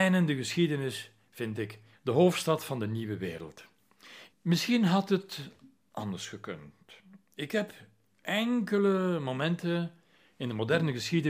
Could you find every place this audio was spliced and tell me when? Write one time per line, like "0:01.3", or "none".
0:01.9
0:04.3